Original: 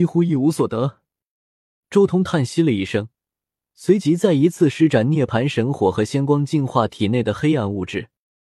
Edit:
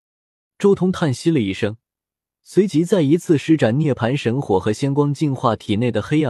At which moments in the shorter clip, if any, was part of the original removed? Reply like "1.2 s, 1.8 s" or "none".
none